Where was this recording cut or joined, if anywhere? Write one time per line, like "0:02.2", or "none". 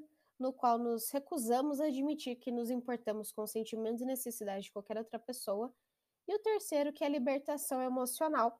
none